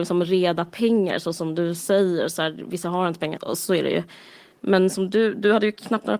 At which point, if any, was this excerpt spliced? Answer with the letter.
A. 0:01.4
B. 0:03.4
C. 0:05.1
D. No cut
B